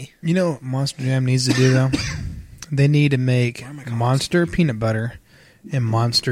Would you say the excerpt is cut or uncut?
uncut